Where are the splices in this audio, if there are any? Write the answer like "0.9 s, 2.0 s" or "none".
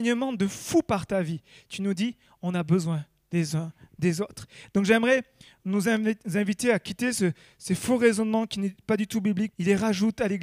9.5 s

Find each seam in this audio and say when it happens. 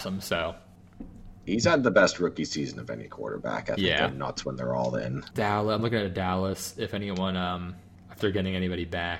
4.1 s, 5.3 s

